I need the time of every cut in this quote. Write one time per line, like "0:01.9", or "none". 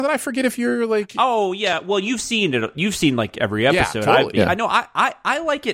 0:04.3